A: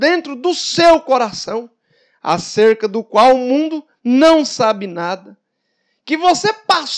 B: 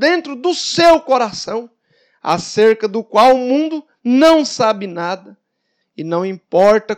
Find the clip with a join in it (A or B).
B